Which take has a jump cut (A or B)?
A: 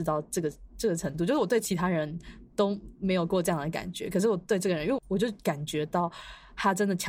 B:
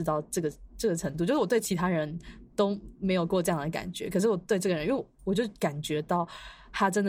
A